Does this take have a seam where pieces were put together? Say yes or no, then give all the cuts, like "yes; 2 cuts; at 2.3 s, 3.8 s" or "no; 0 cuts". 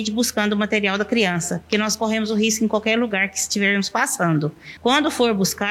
yes; 1 cut; at 4.8 s